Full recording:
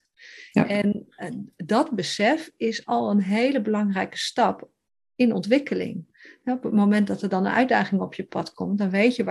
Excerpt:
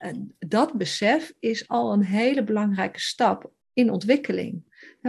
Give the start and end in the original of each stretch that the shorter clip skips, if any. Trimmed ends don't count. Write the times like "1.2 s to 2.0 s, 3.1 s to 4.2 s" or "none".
4.8 s to 5.0 s

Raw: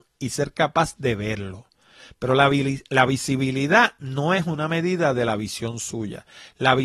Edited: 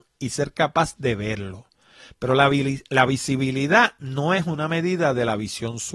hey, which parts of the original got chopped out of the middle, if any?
none

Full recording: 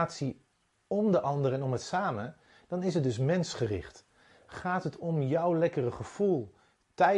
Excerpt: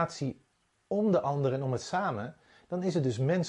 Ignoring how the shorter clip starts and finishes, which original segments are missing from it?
none

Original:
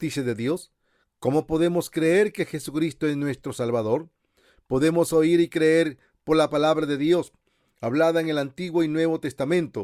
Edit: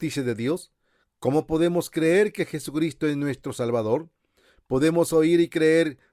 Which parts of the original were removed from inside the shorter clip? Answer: none

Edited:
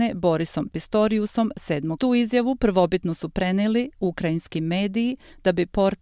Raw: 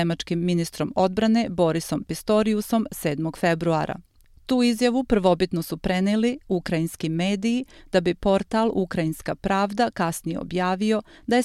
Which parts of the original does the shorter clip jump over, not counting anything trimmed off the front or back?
3.3 s to 4.5 s

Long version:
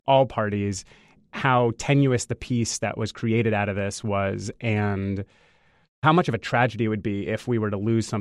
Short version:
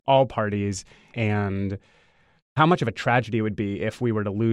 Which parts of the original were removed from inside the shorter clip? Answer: 1.1 s to 4.6 s

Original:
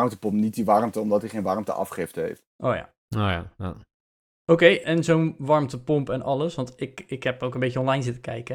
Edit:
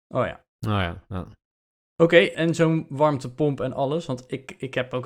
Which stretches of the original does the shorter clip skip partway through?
none

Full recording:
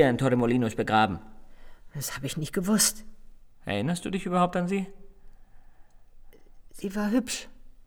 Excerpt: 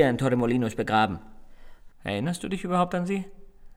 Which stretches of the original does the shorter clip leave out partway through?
1.9 s to 3.5 s

